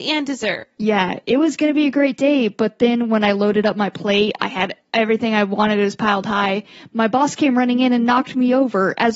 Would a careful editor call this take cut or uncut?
uncut